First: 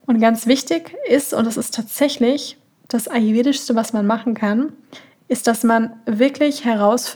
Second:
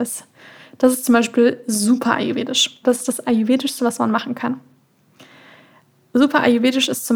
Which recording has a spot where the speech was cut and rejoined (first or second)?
second